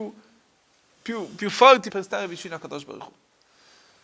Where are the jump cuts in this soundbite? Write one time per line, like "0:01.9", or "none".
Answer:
0:01.9